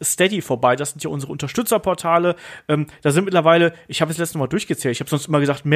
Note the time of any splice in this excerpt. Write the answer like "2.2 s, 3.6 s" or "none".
none